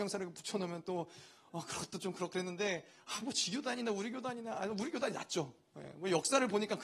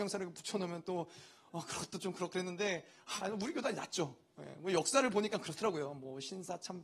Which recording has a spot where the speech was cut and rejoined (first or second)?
second